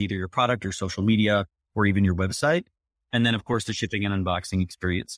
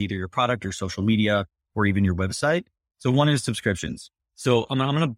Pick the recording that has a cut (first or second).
second